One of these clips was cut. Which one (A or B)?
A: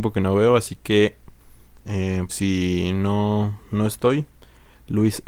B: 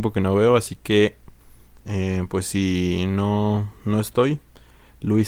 A